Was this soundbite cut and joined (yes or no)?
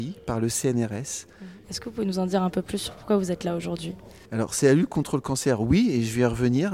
yes